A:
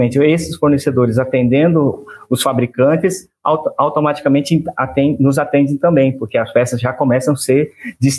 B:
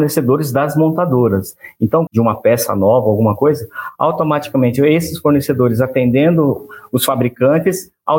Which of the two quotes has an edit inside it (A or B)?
B